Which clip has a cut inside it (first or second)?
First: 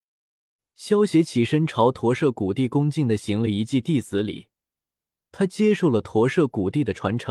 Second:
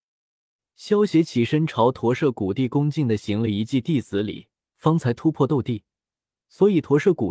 second